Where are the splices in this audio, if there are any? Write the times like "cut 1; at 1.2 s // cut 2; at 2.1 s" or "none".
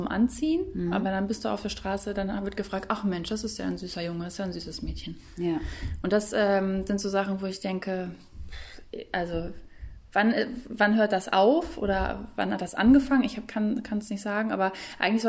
none